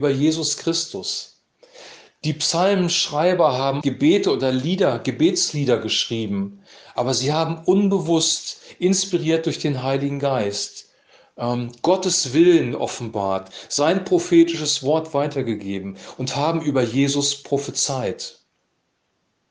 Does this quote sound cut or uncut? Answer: cut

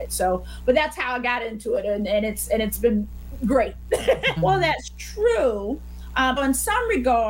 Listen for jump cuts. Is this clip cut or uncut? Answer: cut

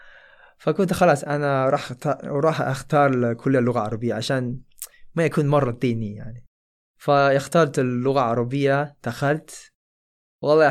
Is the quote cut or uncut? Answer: uncut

